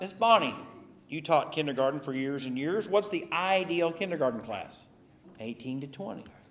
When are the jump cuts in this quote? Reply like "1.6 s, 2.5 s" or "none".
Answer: 5.2 s